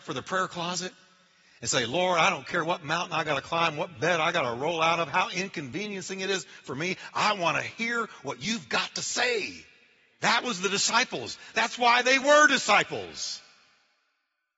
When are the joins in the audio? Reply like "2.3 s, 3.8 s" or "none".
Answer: none

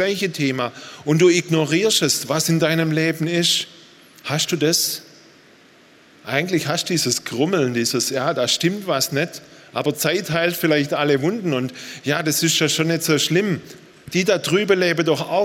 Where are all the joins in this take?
4.2 s

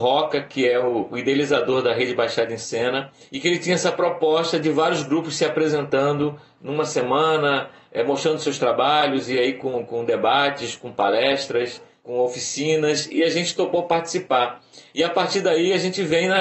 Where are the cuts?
none

